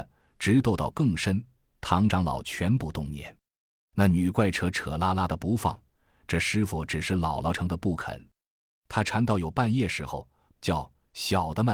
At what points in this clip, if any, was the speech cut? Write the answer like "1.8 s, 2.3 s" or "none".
7.5 s, 10.5 s